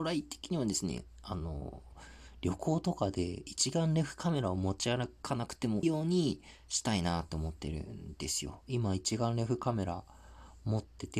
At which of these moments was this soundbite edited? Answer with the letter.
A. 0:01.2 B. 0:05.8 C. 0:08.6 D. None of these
B